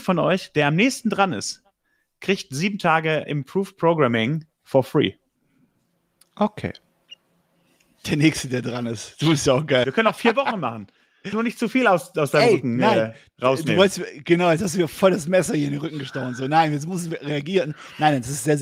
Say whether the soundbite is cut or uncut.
cut